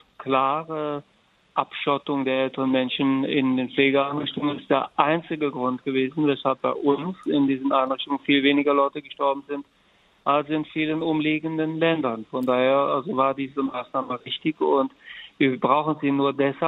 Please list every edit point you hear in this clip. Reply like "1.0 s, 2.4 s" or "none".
none

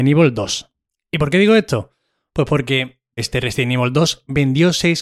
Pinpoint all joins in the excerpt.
3.2 s

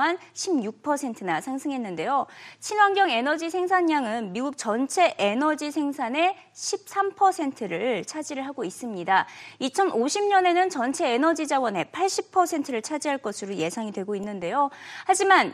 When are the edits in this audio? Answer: none

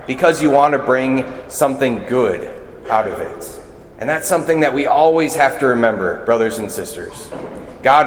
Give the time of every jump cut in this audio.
none

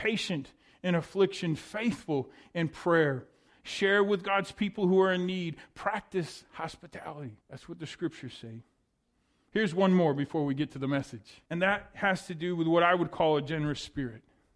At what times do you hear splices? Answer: 7.4 s, 11.5 s

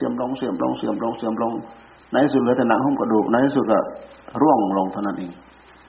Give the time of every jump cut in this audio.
none

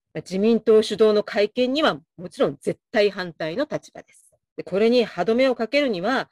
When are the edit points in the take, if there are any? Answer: 4.4 s

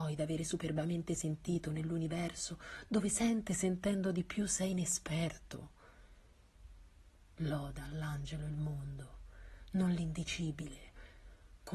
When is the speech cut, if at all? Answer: 7.4 s

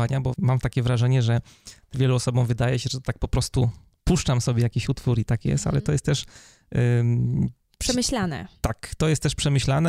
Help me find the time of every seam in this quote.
none

